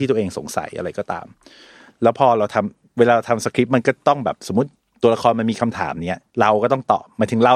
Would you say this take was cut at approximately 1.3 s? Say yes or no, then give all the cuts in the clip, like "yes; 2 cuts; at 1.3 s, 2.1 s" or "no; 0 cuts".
no; 1 cut; at 6.3 s